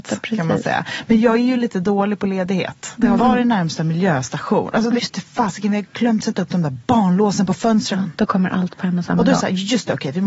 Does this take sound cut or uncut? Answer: cut